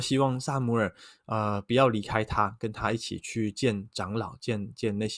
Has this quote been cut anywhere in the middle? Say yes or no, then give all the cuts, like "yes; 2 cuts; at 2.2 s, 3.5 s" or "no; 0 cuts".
no; 0 cuts